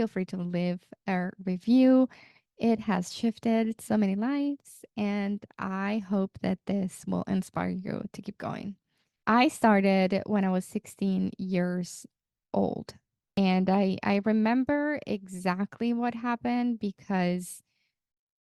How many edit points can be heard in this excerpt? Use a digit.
0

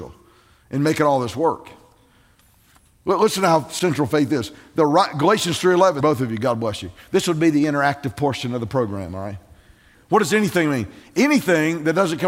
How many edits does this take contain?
2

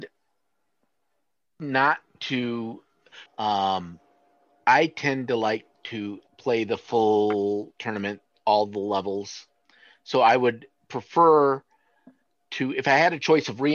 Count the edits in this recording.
2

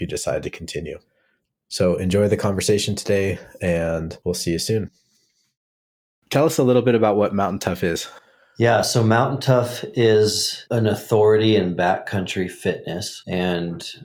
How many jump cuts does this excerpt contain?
0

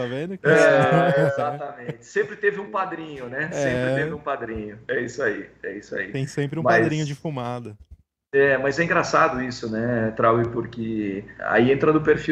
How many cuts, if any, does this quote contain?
1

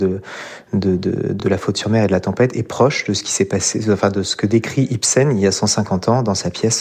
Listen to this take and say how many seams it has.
0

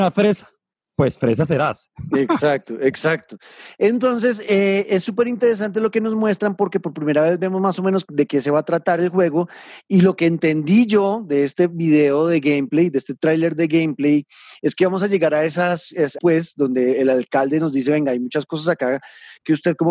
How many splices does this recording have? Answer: 1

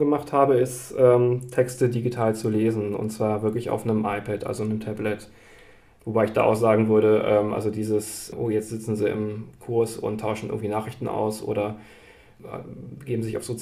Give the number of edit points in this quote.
1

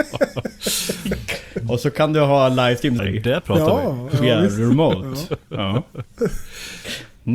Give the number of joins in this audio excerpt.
1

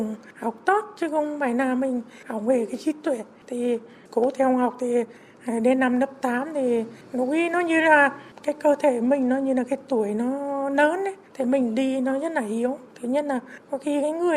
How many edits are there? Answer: 0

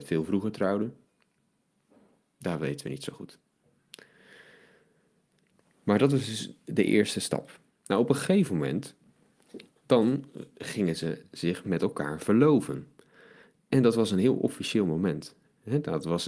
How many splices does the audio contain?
1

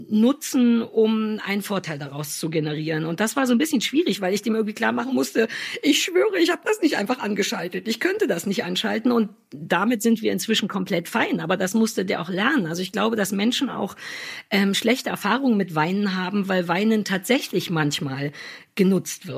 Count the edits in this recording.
0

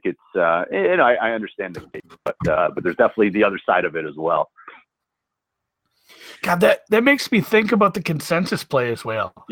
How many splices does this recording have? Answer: 0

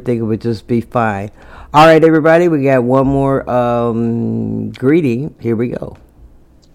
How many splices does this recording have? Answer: 1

